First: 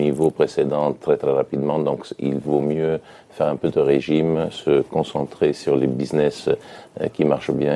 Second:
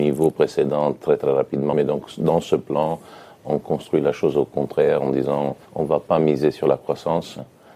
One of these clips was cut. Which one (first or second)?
second